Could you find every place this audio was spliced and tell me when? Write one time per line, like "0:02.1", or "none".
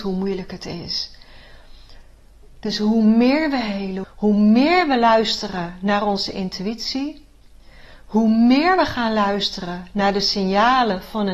0:04.0